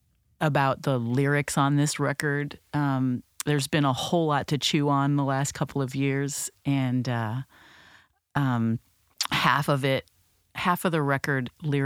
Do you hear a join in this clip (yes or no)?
no